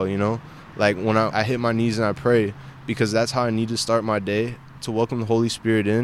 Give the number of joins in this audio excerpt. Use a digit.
1